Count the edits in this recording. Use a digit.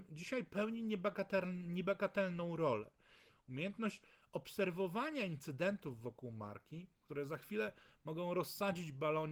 2